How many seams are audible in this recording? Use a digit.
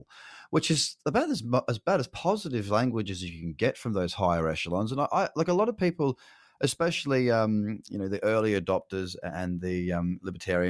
0